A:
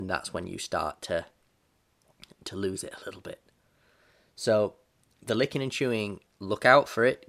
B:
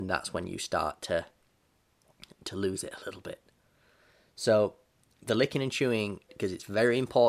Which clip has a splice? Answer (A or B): B